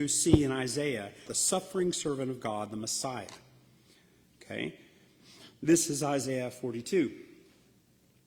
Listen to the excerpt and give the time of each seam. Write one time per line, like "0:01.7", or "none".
0:01.3